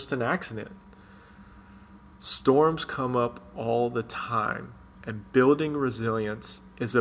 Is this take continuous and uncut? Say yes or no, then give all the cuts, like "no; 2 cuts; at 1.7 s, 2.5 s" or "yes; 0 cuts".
yes; 0 cuts